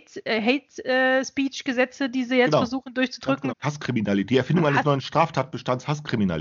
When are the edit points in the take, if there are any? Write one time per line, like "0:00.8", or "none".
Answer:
0:03.5